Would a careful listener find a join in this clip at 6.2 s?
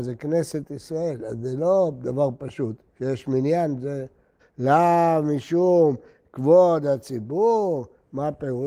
no; 2 cuts; at 2.9 s, 4.4 s

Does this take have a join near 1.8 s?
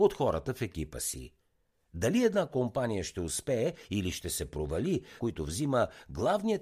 no; 1 cut; at 5.2 s

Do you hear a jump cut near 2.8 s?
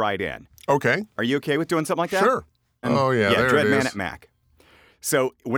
yes; 1 cut; at 2.8 s

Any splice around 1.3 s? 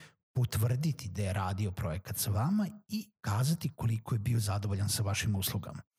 no; 1 cut; at 3.2 s

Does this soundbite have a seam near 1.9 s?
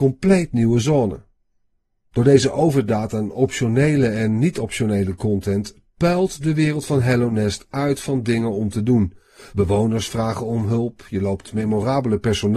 no; 0 cuts

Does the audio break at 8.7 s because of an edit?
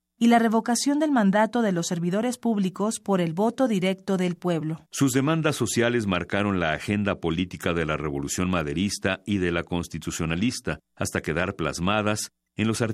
no; 2 cuts; at 4.9 s, 10.8 s

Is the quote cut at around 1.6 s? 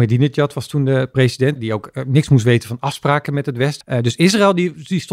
yes; 2 cuts; at 1.6 s, 3.8 s

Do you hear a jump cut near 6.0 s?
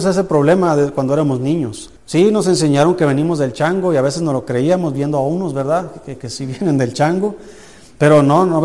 no; 1 cut; at 2.0 s

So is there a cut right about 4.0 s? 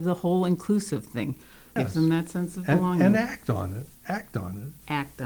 no; 1 cut; at 1.8 s

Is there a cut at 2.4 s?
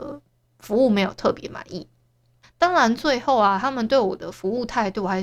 yes; 1 cut; at 2.4 s

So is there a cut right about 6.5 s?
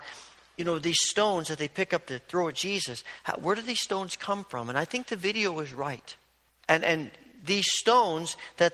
yes; 1 cut; at 6.5 s

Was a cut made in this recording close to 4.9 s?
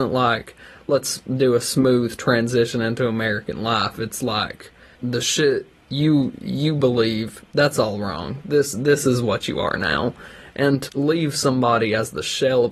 yes; 2 cuts; at 4.9 s, 10.9 s

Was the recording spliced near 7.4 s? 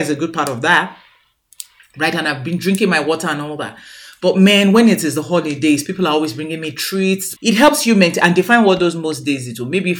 yes; 1 cut; at 7.4 s

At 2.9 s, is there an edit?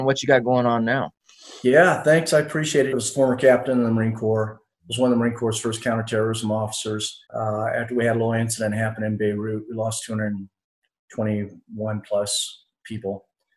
yes; 2 cuts; at 2.9 s, 7.3 s

